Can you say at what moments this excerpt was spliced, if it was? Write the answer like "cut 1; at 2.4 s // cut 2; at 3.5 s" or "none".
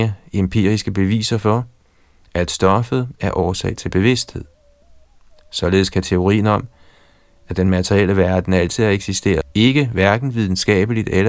cut 1; at 9.4 s